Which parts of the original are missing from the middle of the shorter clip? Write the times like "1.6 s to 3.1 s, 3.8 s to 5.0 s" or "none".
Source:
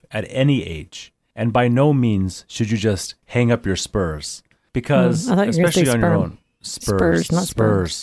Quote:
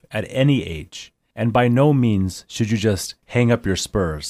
none